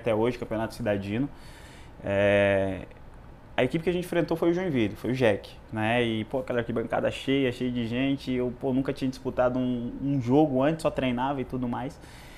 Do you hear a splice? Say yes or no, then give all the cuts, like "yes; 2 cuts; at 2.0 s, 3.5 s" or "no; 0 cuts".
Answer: no; 0 cuts